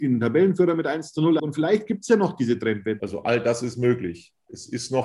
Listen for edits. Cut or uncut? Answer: cut